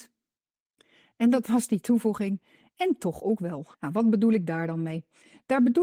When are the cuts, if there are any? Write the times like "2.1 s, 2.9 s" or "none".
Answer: 3.7 s